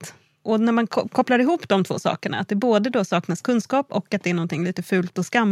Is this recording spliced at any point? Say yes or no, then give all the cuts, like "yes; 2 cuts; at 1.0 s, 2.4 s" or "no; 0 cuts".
no; 0 cuts